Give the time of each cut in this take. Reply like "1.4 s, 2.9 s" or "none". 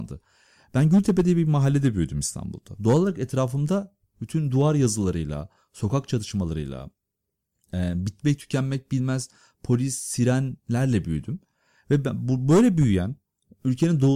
none